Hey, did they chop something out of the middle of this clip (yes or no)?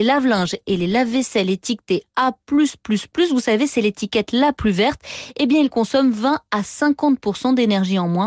no